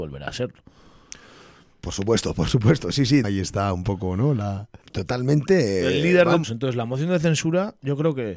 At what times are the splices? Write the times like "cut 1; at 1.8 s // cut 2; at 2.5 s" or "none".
cut 1; at 3.2 s // cut 2; at 4.8 s // cut 3; at 6.4 s